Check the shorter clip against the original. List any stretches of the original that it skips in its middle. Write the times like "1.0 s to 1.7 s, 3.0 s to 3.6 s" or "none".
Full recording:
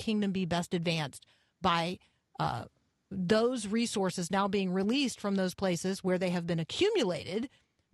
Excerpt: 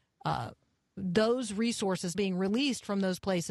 4.3 s to 4.5 s